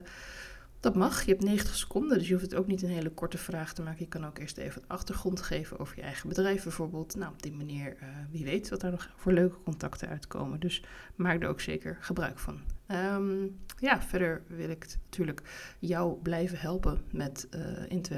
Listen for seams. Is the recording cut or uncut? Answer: uncut